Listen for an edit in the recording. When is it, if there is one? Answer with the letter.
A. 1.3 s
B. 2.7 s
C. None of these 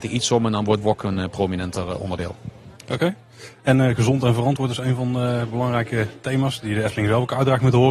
B